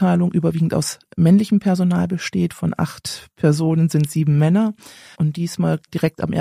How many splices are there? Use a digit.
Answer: 1